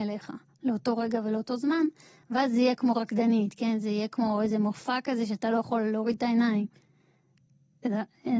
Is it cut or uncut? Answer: uncut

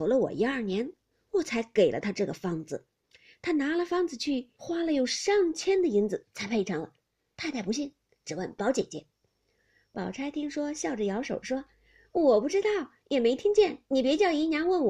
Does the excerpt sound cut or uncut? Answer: cut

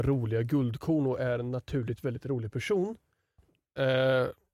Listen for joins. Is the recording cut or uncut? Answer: uncut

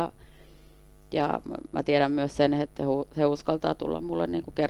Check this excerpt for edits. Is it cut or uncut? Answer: uncut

